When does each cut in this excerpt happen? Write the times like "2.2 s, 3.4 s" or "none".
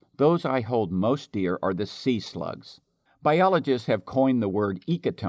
3.1 s